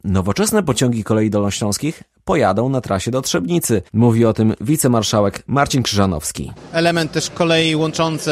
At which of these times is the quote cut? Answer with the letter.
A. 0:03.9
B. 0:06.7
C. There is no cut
C